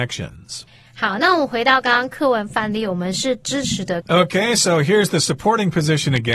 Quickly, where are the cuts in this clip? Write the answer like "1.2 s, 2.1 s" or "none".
4.0 s